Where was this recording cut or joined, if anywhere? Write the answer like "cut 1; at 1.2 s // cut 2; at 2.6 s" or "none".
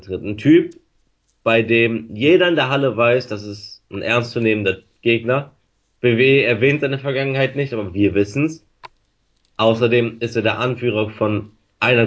none